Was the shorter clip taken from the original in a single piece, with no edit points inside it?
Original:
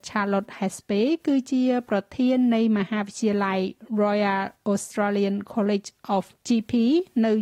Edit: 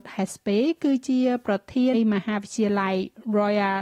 no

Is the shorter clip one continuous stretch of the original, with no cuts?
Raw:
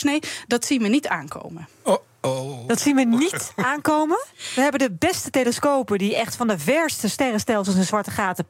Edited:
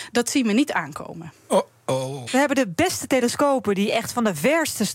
no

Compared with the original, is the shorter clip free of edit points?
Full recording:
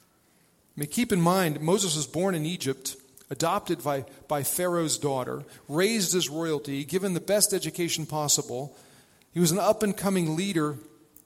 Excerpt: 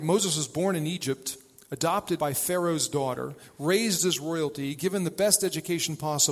no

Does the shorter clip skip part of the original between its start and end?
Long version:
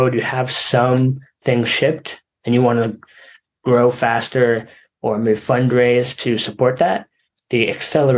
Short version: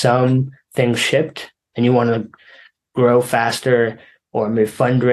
no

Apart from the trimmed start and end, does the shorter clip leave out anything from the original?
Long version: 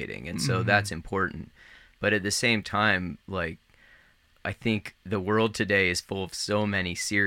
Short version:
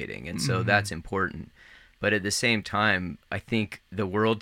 yes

